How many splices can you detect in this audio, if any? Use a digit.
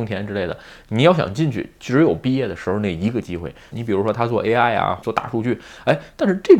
2